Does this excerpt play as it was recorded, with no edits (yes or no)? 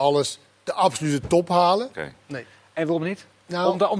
no